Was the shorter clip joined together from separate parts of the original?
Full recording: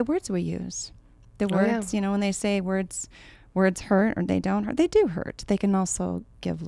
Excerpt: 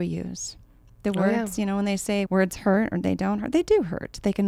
yes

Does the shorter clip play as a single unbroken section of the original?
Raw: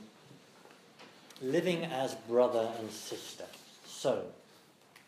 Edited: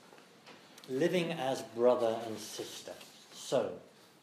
yes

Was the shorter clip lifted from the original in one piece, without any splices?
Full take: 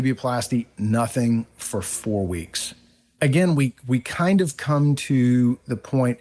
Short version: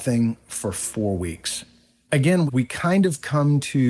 no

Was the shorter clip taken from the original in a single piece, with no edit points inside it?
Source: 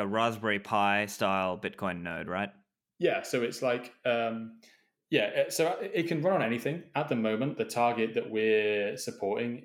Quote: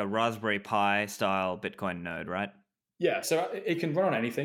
no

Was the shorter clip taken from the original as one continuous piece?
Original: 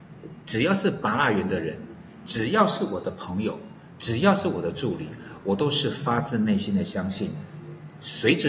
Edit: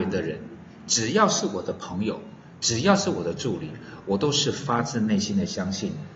yes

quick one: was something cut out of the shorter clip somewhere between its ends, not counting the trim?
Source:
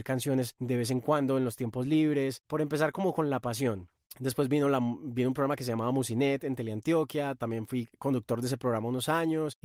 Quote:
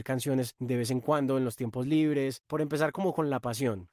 no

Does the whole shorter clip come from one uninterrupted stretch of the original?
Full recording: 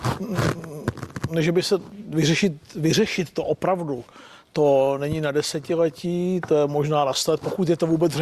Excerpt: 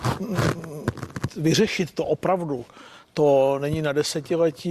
no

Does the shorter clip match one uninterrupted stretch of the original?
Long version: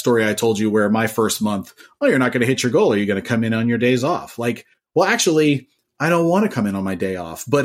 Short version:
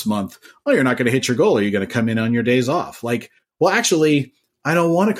yes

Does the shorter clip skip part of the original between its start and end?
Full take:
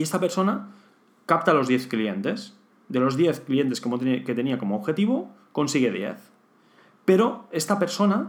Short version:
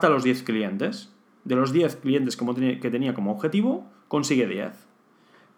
no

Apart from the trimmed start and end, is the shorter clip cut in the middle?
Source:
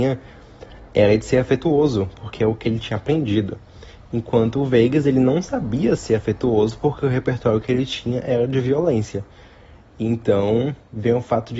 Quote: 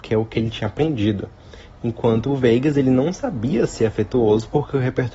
no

